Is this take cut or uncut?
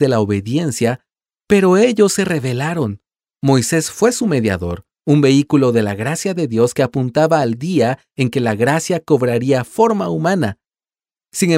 uncut